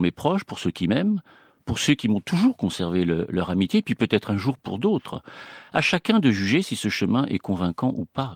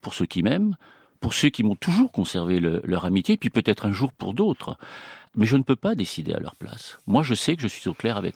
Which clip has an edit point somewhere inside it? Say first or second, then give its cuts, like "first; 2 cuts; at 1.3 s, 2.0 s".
second; 1 cut; at 5.3 s